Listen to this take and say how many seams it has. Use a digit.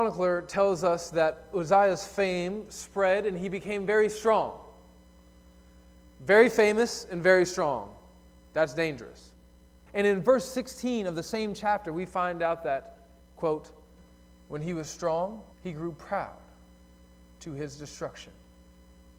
2